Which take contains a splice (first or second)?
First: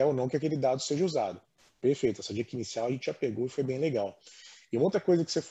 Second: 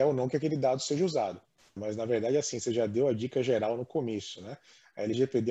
second